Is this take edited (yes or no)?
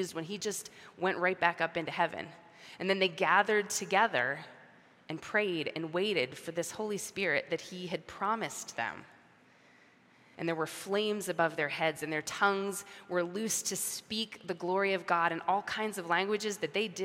yes